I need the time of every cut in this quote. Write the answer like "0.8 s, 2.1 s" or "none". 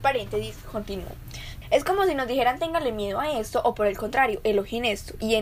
1.6 s